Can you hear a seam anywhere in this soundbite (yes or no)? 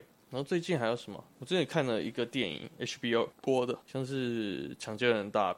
yes